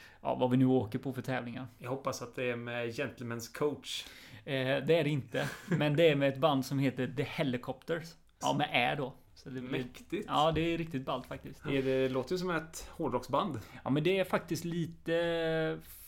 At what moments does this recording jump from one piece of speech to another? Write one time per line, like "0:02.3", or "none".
0:08.4

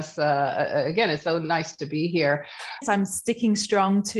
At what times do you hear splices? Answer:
0:02.8

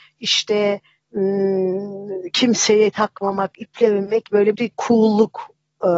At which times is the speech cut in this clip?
0:04.6

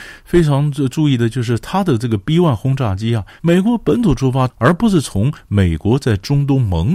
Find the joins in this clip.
0:03.4
0:04.5

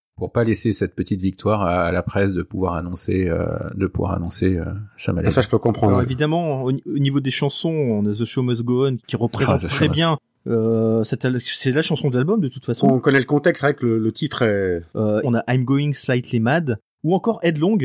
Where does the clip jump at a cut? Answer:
0:09.0
0:15.2

